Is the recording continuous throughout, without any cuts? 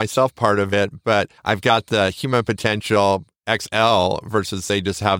no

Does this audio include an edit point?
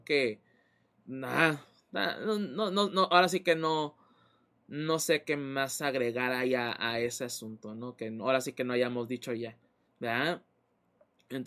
yes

